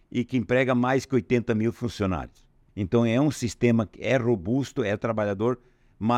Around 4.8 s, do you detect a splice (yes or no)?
no